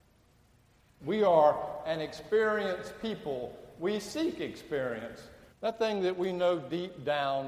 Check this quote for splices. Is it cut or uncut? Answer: cut